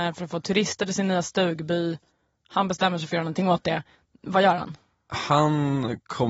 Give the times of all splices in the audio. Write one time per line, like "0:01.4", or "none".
none